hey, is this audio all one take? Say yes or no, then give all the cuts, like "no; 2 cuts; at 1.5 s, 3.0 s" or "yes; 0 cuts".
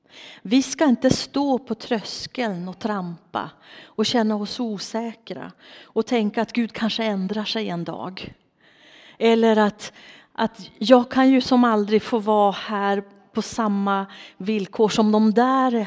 yes; 0 cuts